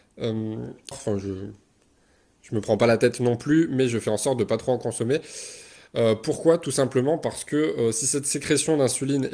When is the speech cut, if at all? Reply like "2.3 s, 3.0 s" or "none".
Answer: 0.9 s